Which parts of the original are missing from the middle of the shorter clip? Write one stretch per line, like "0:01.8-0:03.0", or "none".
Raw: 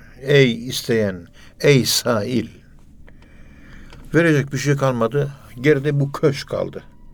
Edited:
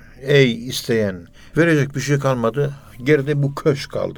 0:01.5-0:04.1